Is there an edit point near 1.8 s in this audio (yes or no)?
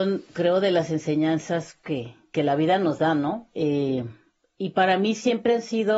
no